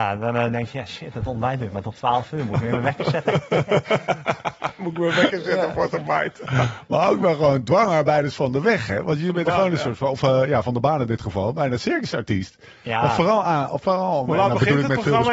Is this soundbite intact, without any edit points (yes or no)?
yes